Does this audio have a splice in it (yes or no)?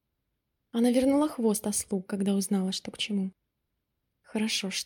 no